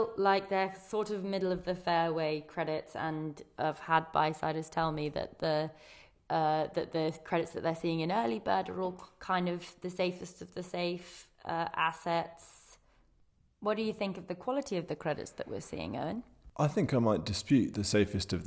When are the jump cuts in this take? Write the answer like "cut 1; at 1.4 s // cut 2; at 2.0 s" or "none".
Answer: none